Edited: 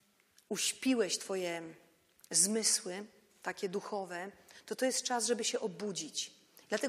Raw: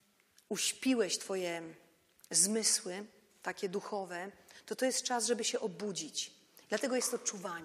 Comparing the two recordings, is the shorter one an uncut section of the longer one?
yes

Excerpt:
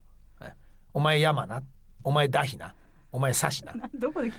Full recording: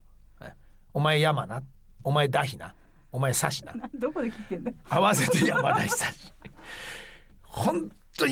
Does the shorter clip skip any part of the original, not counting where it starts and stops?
no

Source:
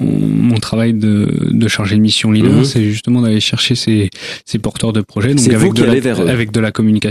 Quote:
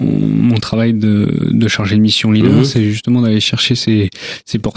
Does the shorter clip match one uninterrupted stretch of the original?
yes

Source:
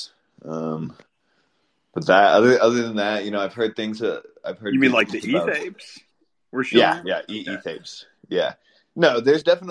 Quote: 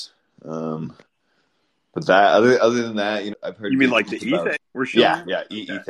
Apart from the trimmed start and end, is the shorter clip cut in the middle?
yes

